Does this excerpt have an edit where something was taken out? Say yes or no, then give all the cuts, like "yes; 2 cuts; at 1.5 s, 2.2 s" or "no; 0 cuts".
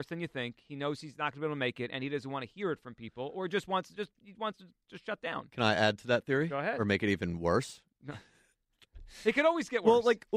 no; 0 cuts